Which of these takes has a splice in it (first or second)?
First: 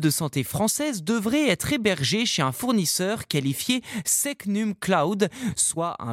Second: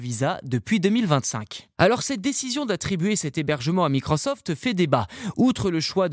second